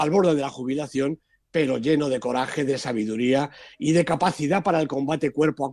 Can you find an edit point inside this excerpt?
no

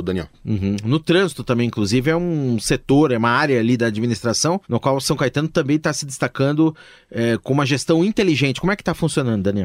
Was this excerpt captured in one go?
no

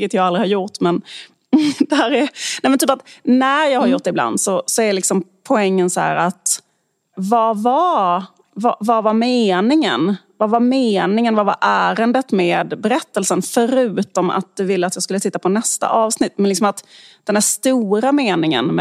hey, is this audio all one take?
no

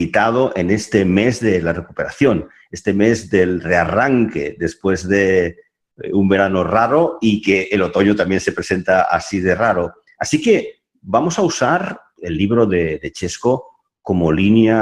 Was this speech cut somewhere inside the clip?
no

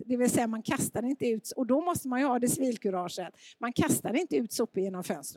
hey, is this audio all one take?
yes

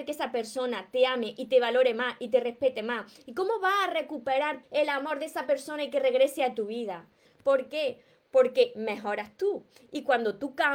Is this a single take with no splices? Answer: no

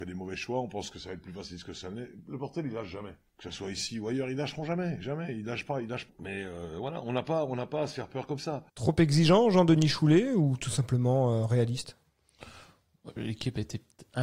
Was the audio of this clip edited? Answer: yes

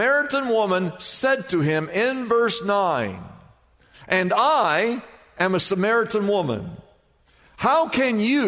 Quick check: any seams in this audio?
yes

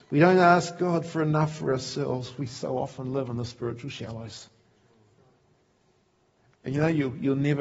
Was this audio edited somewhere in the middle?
no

